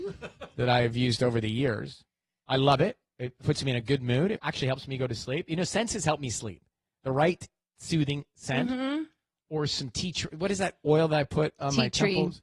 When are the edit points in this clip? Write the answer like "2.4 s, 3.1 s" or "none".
4.4 s